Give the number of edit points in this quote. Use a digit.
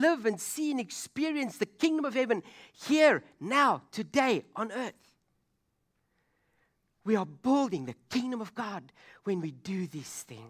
0